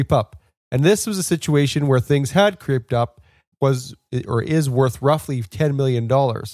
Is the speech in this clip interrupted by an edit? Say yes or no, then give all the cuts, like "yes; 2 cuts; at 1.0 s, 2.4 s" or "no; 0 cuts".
yes; 1 cut; at 3.5 s